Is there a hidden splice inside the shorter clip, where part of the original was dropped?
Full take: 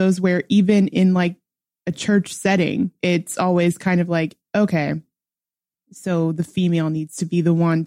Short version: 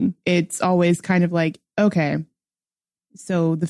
no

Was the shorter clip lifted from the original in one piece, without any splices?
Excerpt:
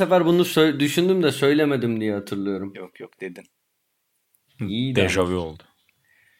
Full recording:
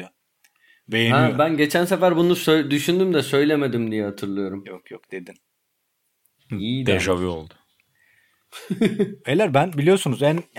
yes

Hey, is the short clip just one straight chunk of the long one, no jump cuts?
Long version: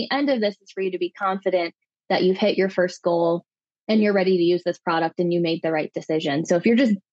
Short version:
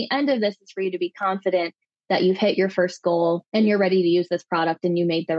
no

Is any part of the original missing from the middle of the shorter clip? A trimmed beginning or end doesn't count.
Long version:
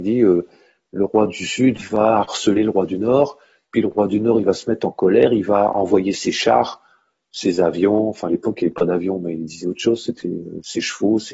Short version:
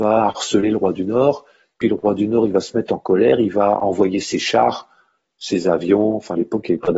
no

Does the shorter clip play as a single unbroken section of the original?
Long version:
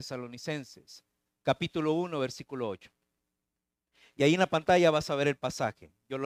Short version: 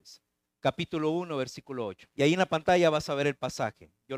no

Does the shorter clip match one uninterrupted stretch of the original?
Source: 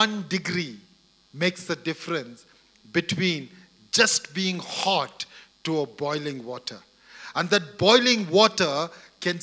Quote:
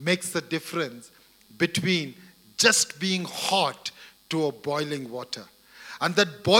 yes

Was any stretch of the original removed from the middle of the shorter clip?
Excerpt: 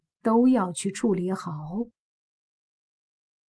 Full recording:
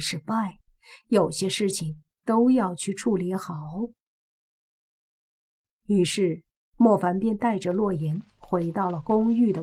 no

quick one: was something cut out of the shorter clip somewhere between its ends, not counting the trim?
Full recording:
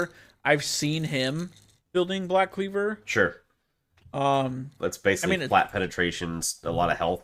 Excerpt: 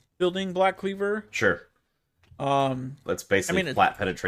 no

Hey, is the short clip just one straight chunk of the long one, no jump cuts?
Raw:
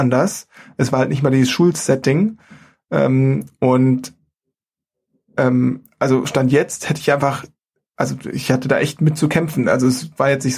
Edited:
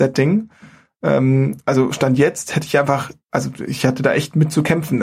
no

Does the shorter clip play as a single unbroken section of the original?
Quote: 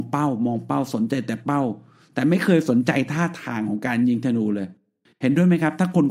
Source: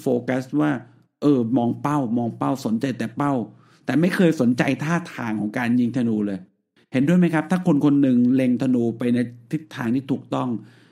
yes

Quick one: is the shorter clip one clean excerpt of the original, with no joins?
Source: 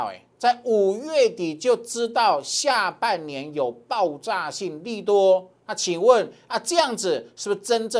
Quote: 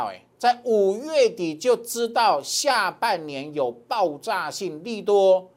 yes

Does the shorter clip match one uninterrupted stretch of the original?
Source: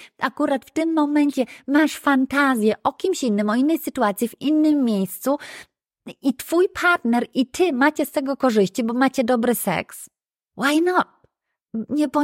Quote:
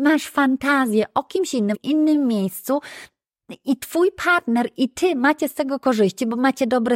no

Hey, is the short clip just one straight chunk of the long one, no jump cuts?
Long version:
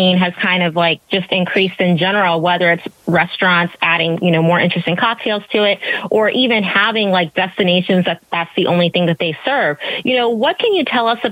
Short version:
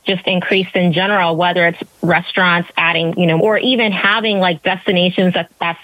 no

